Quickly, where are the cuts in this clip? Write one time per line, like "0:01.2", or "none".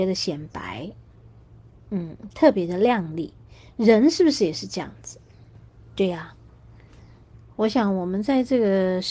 none